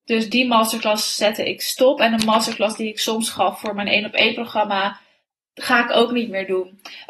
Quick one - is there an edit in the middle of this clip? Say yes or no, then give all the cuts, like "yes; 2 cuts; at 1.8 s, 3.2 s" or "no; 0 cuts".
no; 0 cuts